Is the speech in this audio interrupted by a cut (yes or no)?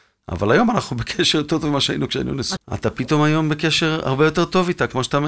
yes